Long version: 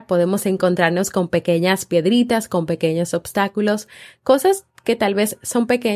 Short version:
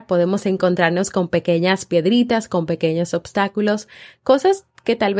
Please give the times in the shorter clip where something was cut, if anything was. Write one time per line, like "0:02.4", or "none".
none